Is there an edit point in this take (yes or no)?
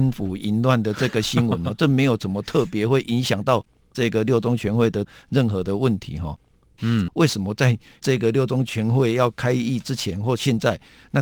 yes